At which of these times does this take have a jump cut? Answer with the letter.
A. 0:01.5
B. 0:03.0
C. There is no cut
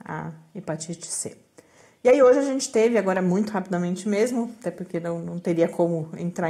C